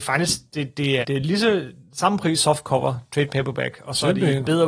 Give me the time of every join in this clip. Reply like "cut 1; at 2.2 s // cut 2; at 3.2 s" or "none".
cut 1; at 1.0 s // cut 2; at 2.4 s